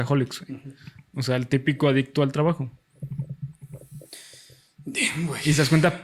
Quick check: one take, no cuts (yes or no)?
yes